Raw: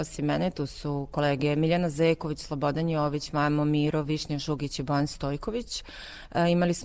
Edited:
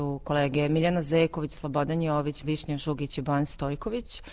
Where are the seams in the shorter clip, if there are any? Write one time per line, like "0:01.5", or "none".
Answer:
0:02.4